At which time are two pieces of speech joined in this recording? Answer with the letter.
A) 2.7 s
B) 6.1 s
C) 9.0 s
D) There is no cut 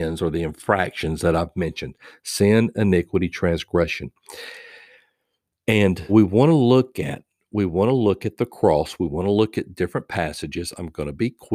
B